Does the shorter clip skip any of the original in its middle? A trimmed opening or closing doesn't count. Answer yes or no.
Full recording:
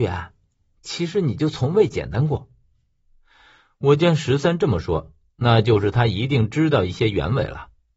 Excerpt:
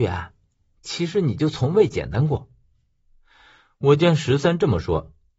no